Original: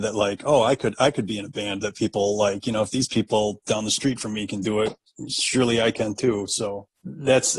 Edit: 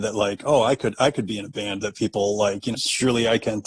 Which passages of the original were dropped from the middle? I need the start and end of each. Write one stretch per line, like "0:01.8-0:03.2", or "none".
0:02.7-0:05.3